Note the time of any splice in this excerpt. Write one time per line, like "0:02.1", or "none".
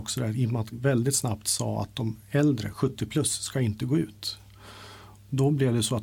none